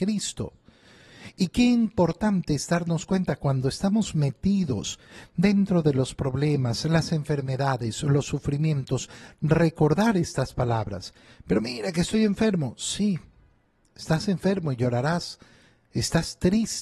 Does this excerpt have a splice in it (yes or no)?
no